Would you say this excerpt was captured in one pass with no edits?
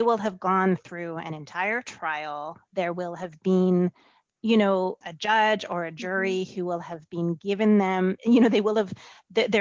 no; 2 cuts; at 5.0 s, 8.2 s

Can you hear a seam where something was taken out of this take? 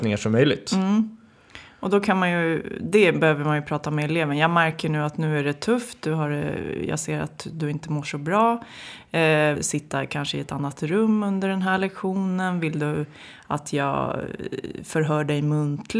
yes; 1 cut; at 9.5 s

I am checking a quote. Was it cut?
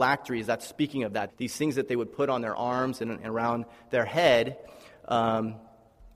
yes; 1 cut; at 1.3 s

